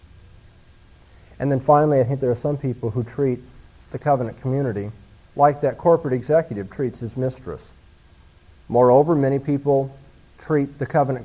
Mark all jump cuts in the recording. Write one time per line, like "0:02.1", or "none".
0:05.2
0:08.5